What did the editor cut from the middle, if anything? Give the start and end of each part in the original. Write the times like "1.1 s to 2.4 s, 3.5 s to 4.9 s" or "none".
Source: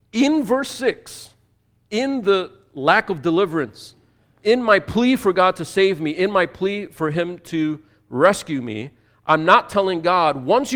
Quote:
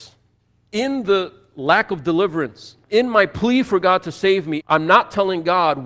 4.0 s to 4.4 s, 6.1 s to 9.2 s